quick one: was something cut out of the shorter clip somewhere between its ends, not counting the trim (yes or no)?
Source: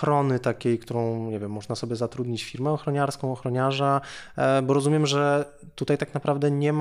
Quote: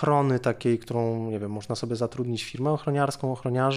no